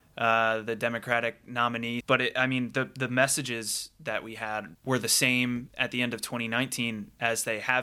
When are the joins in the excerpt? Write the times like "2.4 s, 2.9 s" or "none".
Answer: 2.0 s